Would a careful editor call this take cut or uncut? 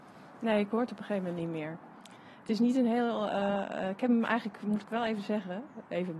uncut